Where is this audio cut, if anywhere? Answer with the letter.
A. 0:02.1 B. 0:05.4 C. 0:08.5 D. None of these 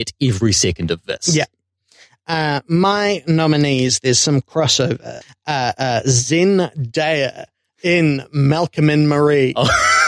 D